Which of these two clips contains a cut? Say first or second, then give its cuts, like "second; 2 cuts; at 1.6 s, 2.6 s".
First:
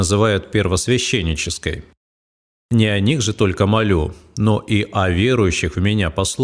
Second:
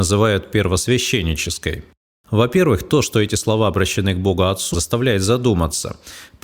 second; 2 cuts; at 2.2 s, 4.7 s